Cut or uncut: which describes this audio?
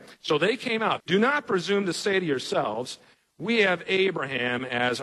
cut